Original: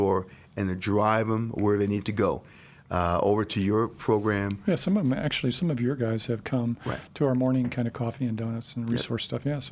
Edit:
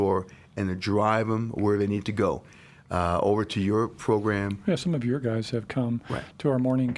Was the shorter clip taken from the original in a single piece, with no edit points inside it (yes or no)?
no